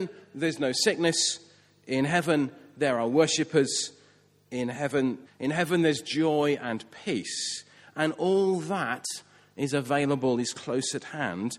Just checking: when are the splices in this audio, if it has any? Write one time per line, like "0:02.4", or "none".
0:05.2